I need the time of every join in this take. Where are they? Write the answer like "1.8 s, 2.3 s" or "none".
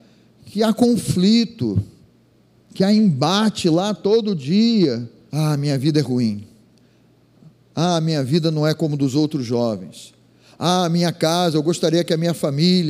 5.3 s